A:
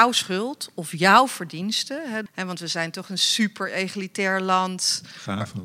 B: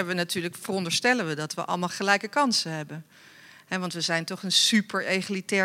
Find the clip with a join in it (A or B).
A